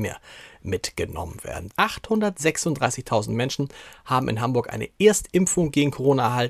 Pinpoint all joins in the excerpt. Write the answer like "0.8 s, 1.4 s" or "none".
1.7 s